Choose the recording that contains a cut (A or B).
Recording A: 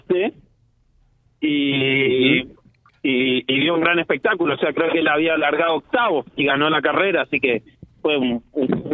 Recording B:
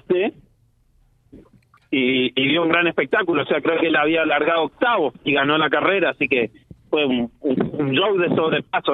B